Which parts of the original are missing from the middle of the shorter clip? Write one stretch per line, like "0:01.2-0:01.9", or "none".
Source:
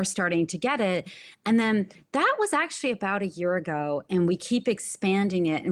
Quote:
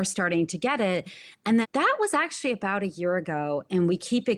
0:01.6-0:02.0